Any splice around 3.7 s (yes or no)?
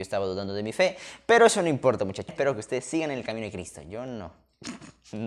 no